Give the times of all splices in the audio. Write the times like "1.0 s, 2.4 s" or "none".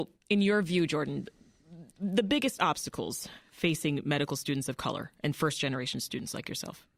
none